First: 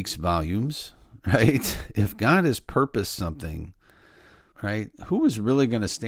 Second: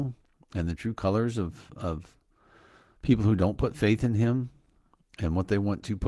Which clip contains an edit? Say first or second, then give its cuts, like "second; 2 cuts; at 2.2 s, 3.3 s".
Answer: first; 1 cut; at 4.5 s